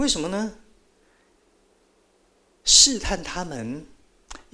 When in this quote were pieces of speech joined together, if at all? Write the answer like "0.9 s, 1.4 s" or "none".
2.5 s